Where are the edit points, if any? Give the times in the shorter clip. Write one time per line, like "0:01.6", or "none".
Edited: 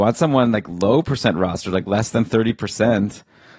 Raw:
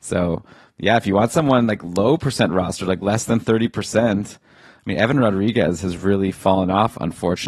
none